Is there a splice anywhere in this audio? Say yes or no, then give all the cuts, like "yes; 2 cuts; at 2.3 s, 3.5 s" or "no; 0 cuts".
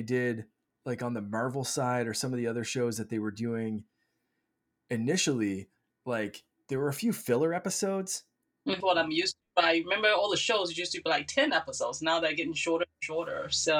yes; 1 cut; at 8.8 s